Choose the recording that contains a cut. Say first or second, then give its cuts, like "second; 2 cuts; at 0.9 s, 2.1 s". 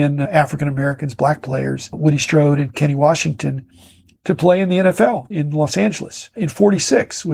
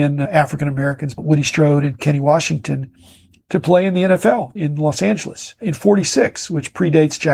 second; 1 cut; at 1.1 s